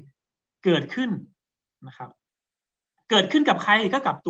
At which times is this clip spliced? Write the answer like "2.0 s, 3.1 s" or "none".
none